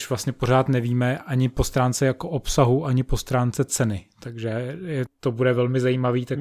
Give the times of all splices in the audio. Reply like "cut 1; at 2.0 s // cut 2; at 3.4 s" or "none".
cut 1; at 5.1 s